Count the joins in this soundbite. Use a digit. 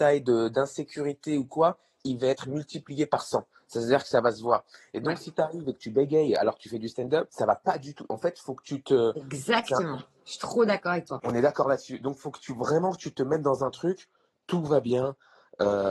0